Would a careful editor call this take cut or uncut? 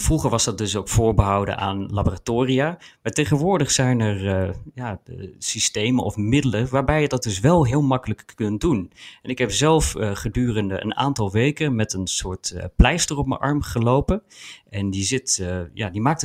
uncut